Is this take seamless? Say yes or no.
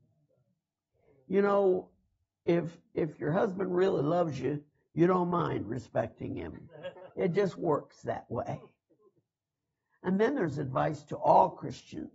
no